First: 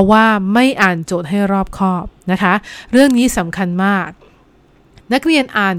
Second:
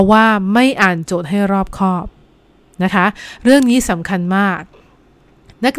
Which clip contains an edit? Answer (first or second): first